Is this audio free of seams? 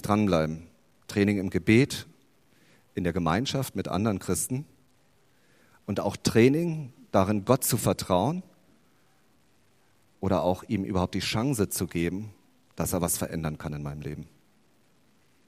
yes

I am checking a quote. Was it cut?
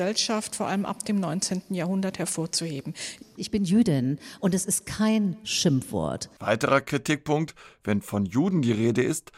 yes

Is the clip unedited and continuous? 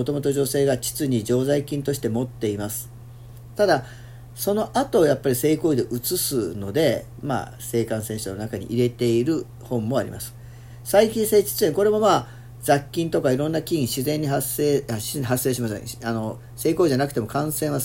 no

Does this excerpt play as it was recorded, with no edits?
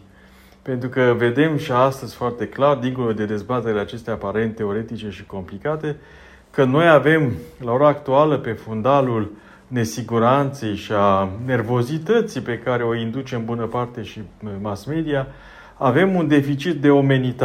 yes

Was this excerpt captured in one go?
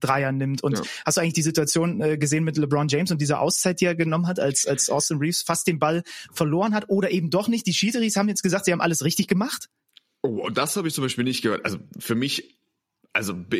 yes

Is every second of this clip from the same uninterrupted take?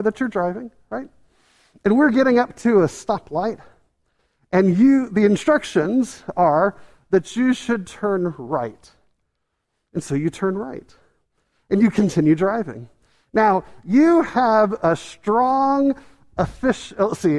yes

